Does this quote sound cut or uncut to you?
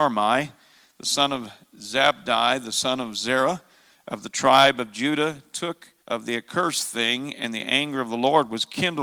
cut